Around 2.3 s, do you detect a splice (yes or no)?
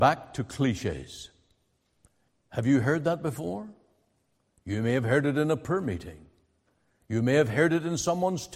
yes